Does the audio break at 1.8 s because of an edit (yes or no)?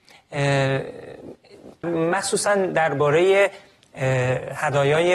yes